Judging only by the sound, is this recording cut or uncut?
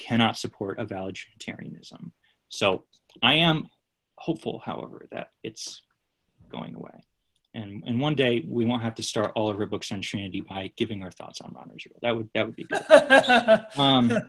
uncut